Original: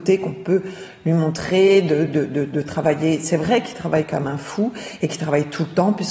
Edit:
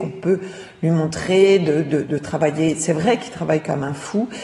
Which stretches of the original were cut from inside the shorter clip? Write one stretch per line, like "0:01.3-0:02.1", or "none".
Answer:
0:02.3-0:02.5